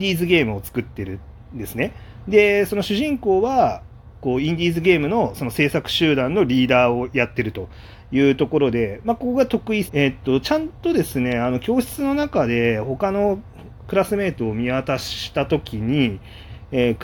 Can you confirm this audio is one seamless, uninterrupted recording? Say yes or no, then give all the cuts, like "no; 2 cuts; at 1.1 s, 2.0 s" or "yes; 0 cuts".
no; 1 cut; at 9.9 s